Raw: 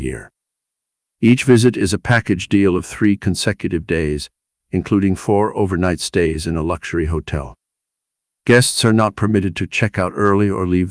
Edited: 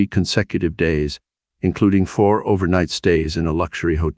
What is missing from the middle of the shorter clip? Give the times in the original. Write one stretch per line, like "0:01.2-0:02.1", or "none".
none